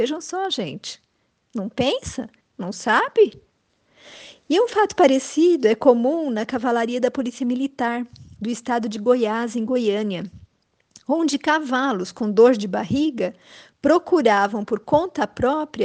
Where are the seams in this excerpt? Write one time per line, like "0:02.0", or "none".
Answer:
0:02.4